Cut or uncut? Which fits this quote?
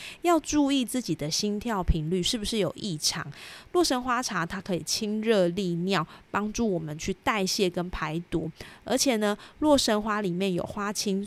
cut